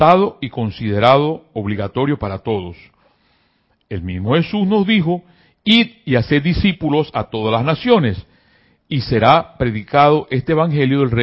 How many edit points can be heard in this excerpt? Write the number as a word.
zero